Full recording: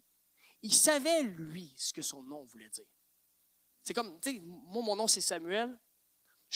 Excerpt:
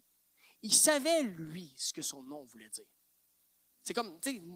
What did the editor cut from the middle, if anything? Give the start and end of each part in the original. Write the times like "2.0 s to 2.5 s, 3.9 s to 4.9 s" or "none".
none